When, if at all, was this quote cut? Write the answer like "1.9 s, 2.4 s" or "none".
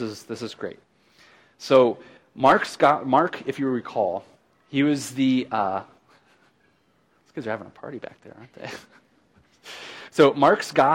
none